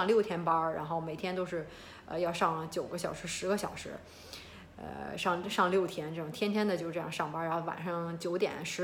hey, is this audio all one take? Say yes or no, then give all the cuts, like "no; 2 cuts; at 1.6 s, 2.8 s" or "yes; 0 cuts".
yes; 0 cuts